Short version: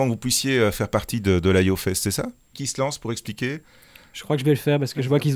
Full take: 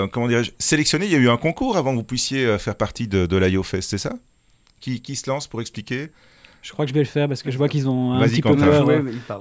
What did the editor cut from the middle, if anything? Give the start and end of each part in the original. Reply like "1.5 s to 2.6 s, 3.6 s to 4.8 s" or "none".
4.4 s to 5.0 s